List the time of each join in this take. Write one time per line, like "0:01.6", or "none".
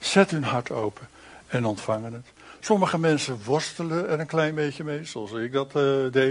none